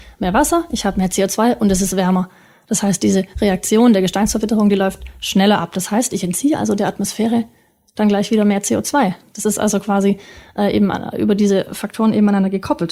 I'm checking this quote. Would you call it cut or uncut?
uncut